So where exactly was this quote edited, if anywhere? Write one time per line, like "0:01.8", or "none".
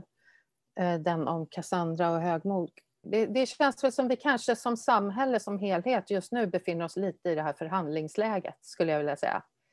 0:03.0